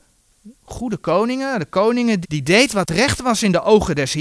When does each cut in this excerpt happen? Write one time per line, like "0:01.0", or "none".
0:02.2